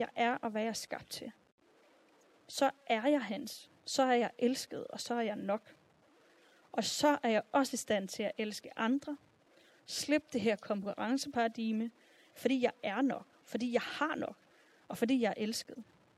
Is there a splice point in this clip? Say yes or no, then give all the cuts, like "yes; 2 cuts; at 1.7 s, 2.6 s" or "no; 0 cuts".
no; 0 cuts